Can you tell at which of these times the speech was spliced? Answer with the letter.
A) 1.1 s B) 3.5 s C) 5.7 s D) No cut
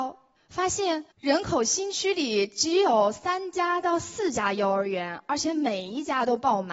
A